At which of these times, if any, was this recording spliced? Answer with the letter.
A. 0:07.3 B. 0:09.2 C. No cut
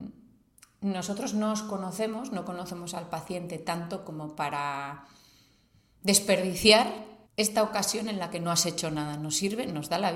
A